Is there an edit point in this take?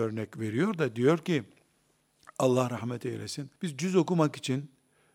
yes; 1 cut; at 3.6 s

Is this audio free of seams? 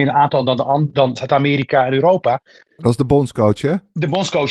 no; 1 cut; at 2.8 s

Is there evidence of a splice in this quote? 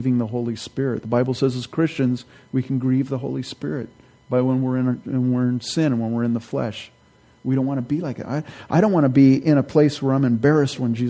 no; 0 cuts

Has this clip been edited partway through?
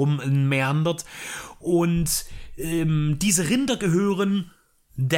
no; 0 cuts

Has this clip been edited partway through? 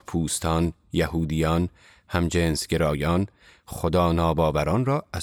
no; 0 cuts

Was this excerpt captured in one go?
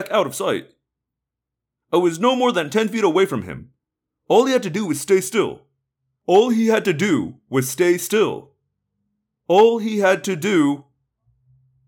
yes; 0 cuts

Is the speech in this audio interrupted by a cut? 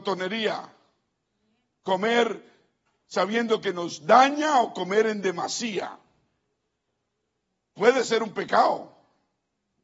no; 0 cuts

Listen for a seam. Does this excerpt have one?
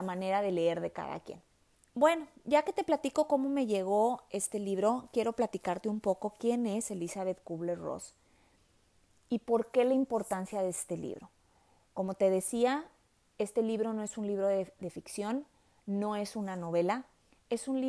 no; 0 cuts

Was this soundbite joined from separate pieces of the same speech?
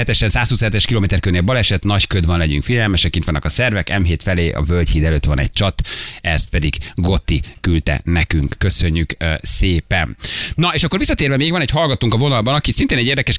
no; 0 cuts

